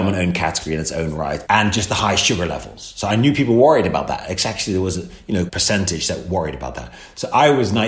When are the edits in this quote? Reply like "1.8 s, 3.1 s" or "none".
1.5 s, 5.5 s